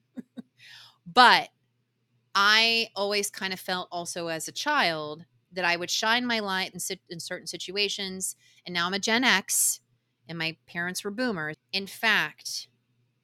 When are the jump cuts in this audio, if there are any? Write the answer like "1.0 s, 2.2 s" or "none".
6.7 s, 11.5 s

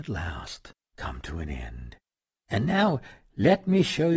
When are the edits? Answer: none

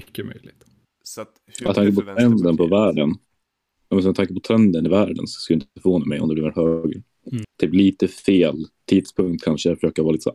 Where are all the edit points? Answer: 1.7 s, 7.4 s

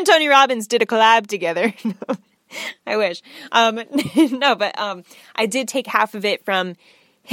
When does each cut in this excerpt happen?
none

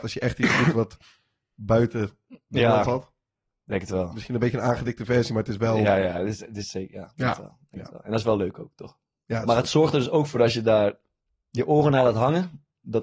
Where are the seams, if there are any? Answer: none

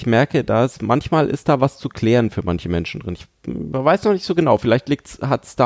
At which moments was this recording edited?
none

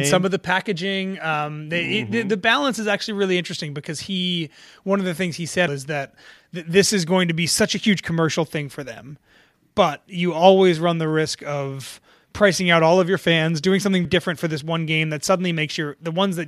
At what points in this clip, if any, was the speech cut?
5.7 s, 14.0 s

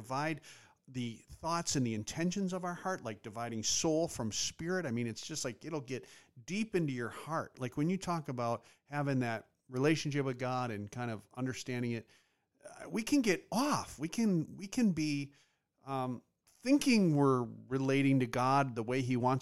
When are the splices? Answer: none

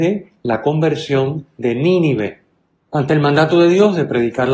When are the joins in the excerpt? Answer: 2.9 s

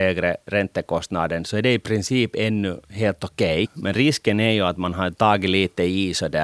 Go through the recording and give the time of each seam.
3.6 s

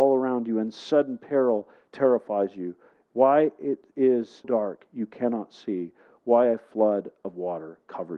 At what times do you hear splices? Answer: 4.4 s

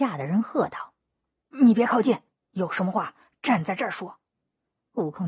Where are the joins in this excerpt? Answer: none

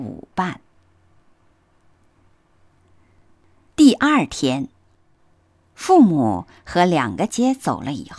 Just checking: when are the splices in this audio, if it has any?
7.3 s

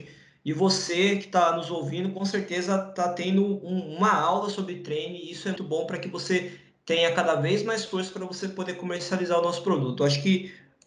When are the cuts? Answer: 5.6 s

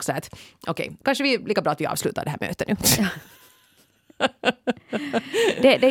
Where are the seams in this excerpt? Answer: 1.0 s

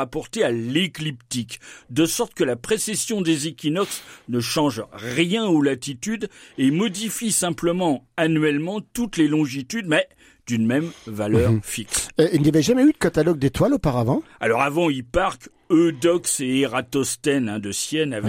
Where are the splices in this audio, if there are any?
none

